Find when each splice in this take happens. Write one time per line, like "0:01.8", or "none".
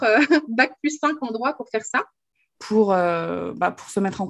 0:02.6